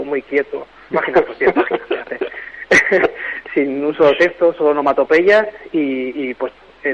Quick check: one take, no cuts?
no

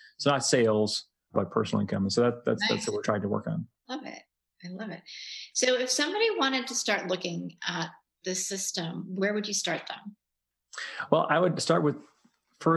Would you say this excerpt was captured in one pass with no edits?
no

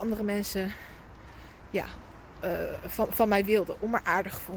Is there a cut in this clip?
no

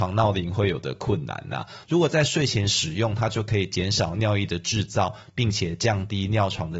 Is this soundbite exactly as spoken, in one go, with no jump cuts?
no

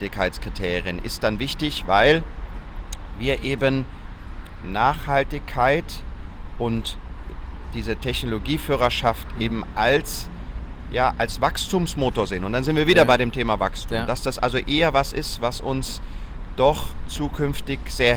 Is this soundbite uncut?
yes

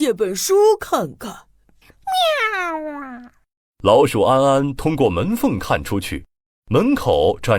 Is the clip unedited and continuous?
yes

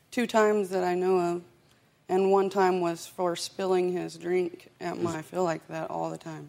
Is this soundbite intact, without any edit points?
no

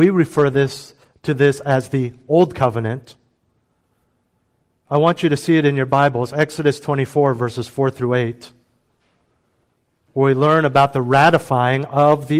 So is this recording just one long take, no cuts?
yes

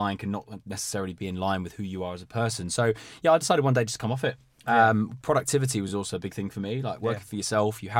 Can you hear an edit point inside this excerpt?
no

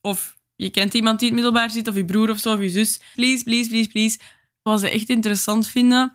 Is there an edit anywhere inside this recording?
yes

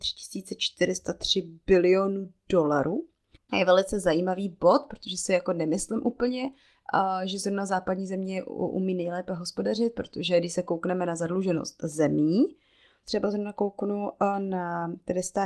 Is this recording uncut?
no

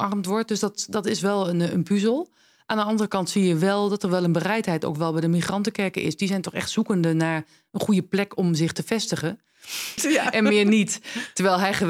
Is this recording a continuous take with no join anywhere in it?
no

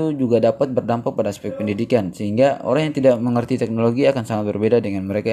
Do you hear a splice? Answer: no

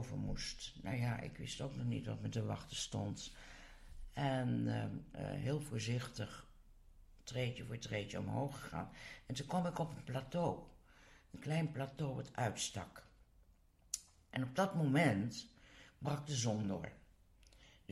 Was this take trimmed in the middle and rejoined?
yes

